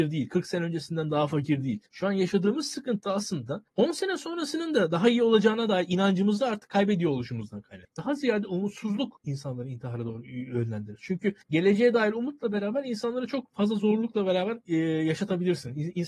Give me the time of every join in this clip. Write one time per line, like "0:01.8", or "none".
0:07.9